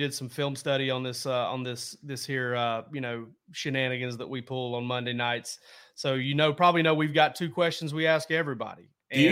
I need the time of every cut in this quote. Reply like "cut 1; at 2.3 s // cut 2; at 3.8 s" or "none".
none